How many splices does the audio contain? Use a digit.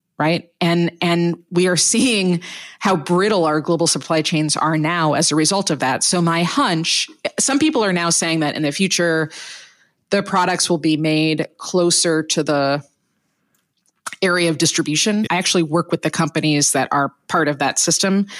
1